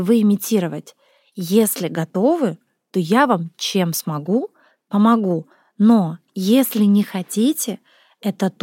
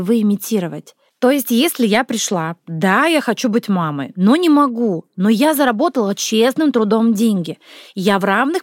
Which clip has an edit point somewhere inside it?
second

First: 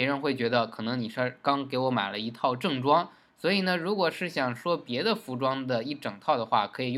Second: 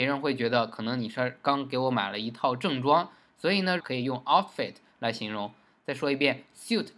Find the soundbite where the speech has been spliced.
second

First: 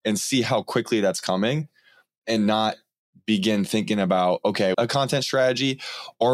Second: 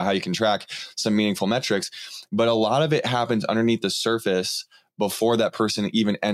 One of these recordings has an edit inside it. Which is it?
first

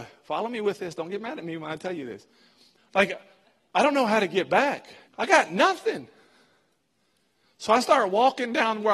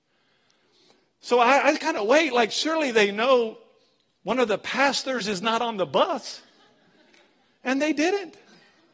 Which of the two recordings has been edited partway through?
first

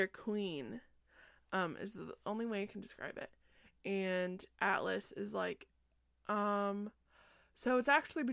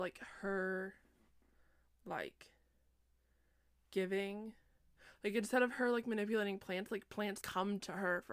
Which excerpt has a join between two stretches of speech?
second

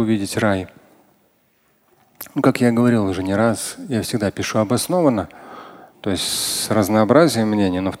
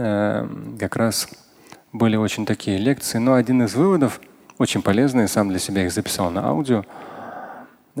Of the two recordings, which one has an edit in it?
first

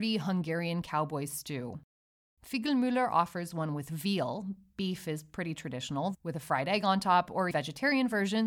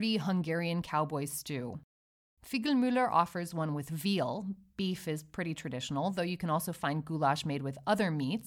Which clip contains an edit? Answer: first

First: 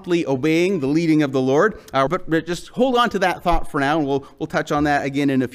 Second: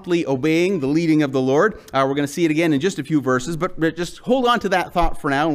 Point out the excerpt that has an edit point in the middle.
first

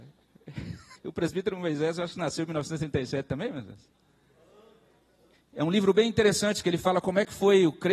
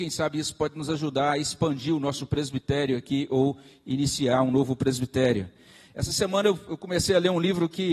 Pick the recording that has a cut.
first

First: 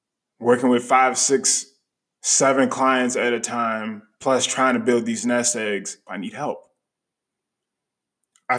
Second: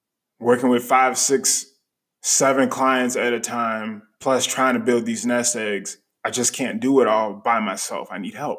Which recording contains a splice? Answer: first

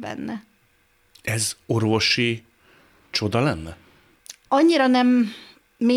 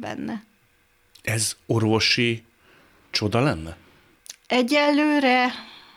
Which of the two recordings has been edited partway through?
first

